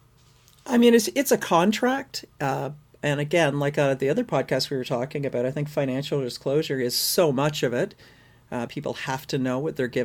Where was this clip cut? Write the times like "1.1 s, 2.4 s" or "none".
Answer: 8.7 s